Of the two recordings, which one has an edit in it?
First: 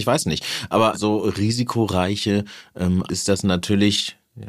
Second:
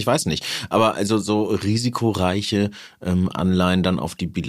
first; 2 cuts; at 0.9 s, 3.1 s

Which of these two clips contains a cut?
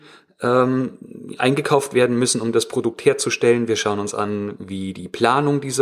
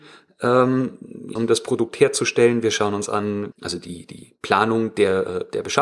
second; 2 cuts; at 1.4 s, 3.5 s

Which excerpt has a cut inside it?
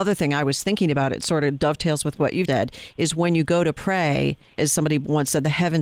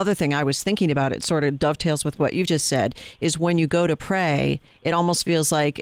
first; 2 cuts; at 2.5 s, 4.6 s

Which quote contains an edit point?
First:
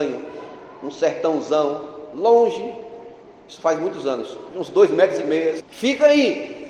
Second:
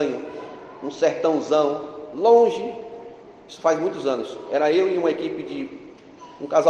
first; 2 cuts; at 4.5 s, 5.6 s

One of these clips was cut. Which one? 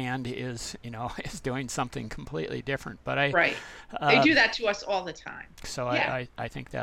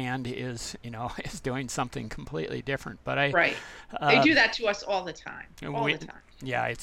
first; 1 cut; at 5.6 s

